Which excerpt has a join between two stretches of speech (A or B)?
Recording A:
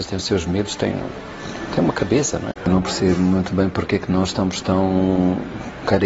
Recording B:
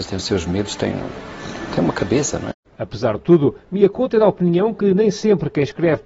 A